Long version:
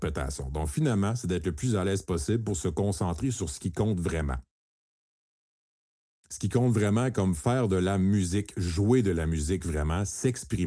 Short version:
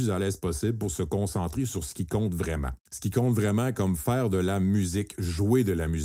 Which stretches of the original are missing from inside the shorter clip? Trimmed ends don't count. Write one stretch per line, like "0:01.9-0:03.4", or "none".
0:04.4-0:06.2

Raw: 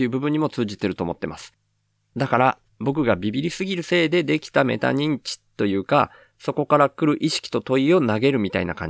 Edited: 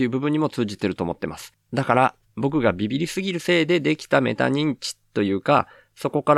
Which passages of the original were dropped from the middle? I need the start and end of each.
0:01.6-0:02.0

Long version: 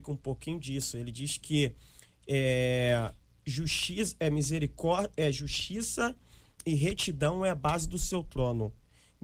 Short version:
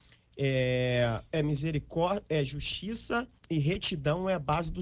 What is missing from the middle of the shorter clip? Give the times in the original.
0:03.2-0:04.2
0:06.2-0:06.5

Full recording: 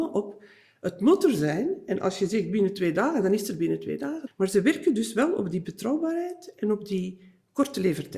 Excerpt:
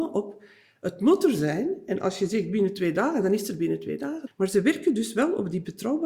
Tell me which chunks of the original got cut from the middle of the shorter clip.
none

